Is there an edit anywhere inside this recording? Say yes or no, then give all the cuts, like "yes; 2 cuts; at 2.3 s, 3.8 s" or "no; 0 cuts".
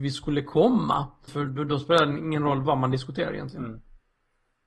yes; 1 cut; at 1.3 s